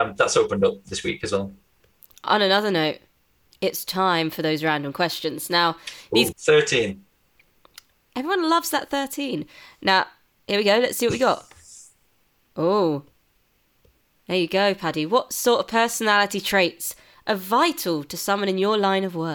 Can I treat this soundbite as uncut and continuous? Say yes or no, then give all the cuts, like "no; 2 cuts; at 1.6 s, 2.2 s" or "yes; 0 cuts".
no; 1 cut; at 6.3 s